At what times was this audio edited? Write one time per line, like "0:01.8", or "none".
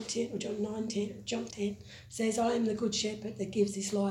0:01.5